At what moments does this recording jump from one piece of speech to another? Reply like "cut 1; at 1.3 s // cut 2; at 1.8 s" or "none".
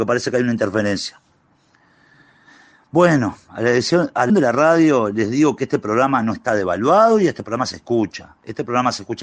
cut 1; at 4.3 s